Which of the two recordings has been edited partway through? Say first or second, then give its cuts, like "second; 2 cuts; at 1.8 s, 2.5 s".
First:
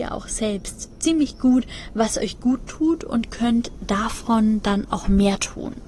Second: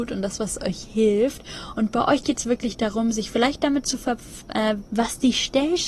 second; 1 cut; at 4.9 s